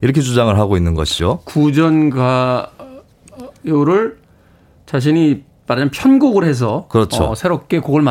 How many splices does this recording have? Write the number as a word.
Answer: zero